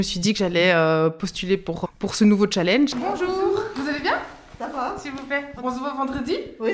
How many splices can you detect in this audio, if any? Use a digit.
3